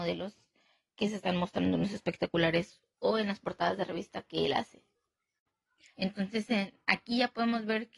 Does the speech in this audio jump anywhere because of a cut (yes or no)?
yes